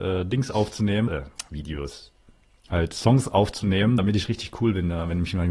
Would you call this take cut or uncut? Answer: cut